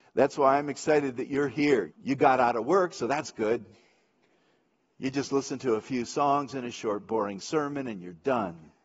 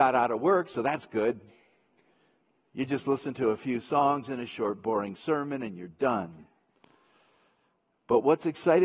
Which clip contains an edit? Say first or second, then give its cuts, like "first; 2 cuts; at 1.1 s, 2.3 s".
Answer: first; 1 cut; at 1.9 s